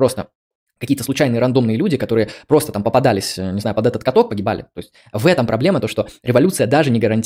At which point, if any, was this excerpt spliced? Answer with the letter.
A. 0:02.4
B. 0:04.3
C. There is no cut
B